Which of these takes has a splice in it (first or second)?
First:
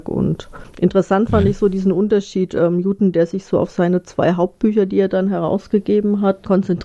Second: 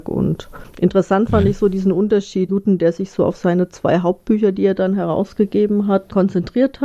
second